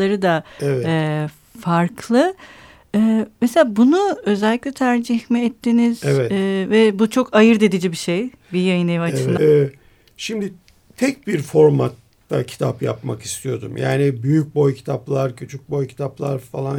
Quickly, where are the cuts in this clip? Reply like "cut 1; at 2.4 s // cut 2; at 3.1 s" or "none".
cut 1; at 9.4 s